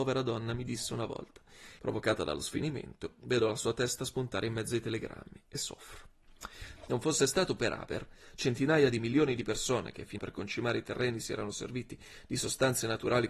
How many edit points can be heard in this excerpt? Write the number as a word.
three